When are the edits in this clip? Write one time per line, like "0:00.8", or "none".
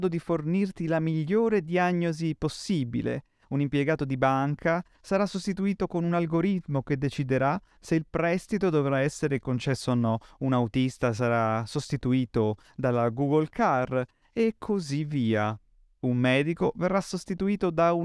0:15.9